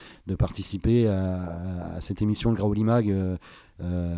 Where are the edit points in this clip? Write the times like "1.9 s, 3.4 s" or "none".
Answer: 2.0 s